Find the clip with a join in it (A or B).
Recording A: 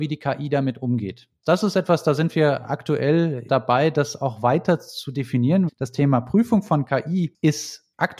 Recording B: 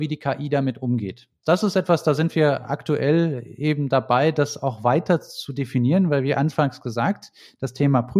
A